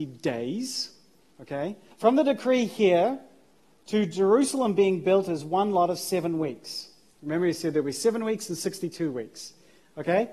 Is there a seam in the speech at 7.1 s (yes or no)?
no